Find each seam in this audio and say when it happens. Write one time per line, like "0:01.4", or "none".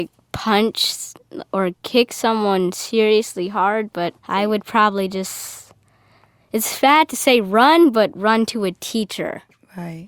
0:04.2

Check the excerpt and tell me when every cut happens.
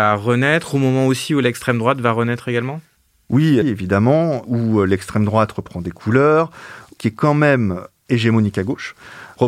0:03.6
0:07.0

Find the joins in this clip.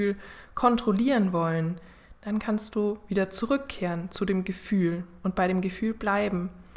none

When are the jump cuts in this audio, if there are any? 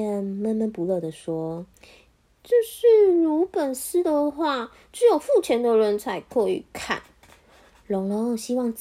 0:01.7

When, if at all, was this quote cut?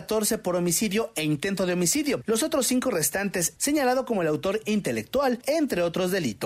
0:03.6
0:05.4

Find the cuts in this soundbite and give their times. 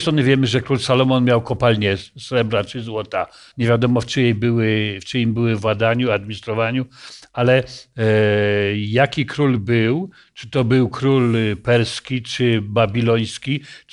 0:03.5

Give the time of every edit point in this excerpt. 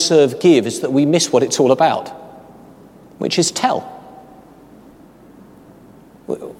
none

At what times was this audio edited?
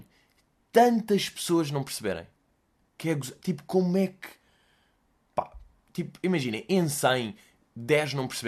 none

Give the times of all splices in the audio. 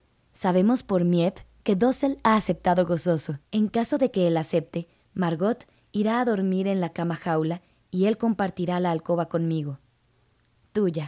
0:03.4

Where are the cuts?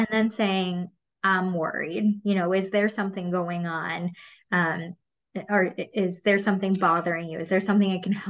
none

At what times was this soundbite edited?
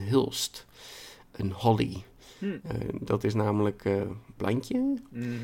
0:04.4

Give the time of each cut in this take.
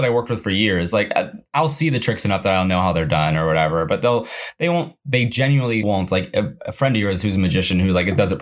0:01.5
0:05.8

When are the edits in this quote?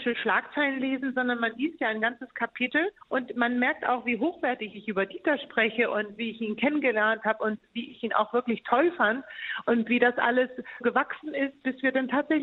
0:03.0
0:10.8

